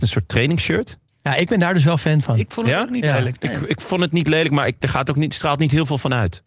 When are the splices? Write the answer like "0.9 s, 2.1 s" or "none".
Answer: 4.8 s